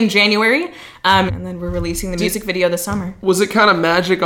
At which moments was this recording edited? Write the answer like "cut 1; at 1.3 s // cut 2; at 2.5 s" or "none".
cut 1; at 1.3 s